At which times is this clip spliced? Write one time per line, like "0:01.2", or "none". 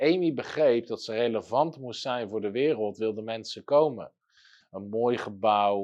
0:04.6